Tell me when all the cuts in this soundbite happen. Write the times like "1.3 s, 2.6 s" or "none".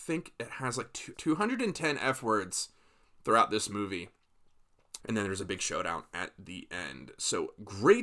1.1 s, 5.0 s